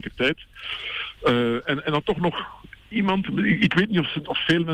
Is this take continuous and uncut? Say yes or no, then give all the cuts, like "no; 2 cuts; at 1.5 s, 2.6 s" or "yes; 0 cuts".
yes; 0 cuts